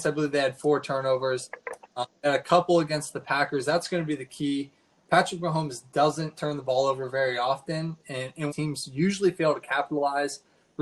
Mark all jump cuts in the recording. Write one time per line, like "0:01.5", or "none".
0:08.5